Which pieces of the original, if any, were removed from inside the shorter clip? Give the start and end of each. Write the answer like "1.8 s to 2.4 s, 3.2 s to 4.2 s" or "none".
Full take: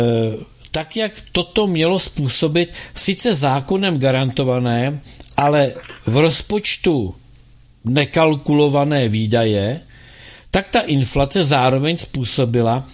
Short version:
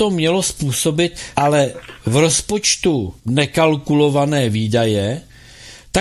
2.9 s to 5.4 s, 7.2 s to 7.8 s